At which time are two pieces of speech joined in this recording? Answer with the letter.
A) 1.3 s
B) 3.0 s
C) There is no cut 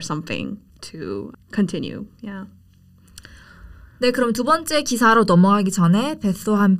A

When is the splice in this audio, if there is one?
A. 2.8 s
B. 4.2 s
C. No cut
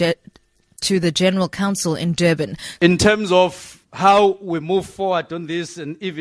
A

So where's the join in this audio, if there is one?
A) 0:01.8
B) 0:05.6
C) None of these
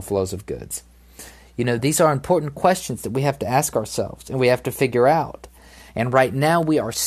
A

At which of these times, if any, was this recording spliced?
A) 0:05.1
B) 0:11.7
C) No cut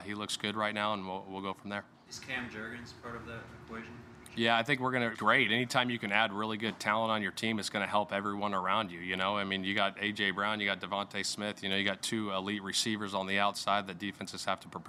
A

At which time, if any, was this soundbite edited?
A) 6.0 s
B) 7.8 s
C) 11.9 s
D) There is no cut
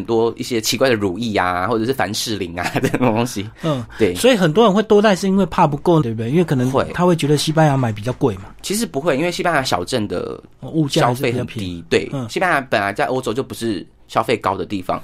A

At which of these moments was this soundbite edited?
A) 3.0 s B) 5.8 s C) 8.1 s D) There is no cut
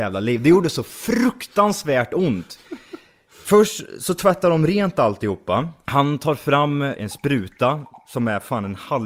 B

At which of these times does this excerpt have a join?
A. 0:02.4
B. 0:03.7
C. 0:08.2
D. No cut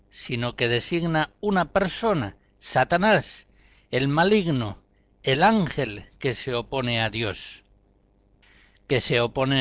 D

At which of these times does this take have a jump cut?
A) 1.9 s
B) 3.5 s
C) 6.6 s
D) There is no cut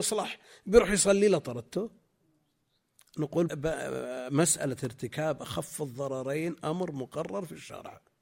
B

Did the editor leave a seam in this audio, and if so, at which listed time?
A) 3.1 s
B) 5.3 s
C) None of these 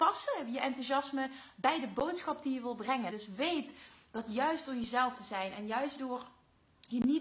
A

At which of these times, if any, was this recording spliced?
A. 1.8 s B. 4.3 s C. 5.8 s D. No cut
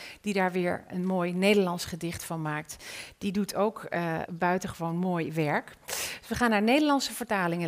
B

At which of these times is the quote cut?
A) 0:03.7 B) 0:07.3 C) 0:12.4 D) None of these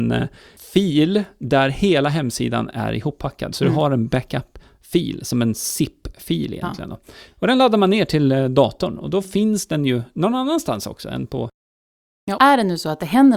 C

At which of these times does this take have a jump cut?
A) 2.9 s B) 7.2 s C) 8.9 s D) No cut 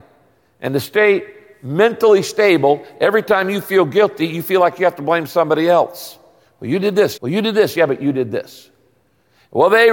B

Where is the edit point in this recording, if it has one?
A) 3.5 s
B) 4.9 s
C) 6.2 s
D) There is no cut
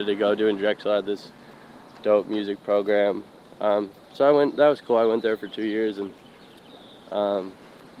D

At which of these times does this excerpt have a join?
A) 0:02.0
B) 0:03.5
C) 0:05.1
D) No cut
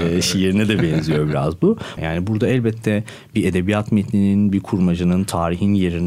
A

